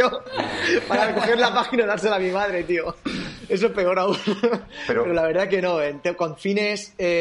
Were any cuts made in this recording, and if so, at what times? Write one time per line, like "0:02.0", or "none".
none